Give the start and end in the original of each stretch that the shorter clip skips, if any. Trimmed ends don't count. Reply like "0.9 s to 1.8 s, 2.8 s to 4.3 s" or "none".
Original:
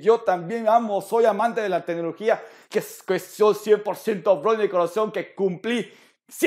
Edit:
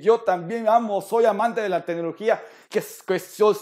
none